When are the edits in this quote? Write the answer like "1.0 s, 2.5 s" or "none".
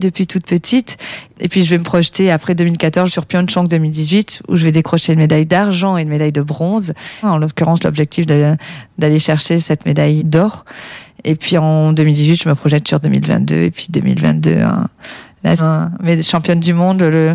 7.2 s, 10.2 s, 15.6 s